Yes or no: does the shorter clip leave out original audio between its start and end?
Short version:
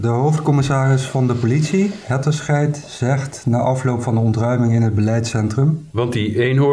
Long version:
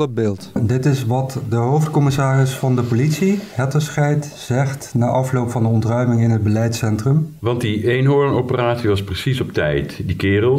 no